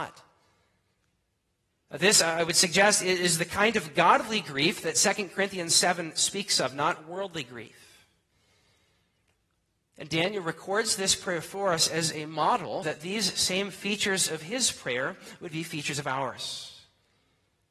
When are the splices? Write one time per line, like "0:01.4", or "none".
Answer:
0:12.8